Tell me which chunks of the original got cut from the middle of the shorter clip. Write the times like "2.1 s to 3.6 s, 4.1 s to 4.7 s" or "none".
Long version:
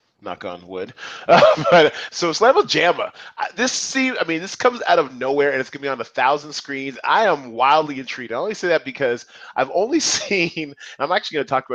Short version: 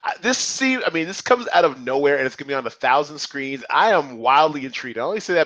none